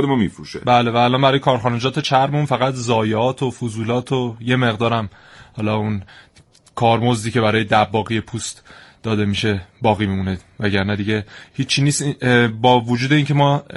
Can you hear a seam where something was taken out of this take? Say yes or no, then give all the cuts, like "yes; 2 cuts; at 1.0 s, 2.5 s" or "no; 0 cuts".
no; 0 cuts